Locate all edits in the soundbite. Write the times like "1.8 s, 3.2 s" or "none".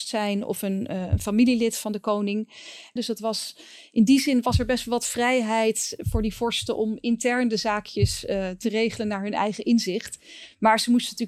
3.0 s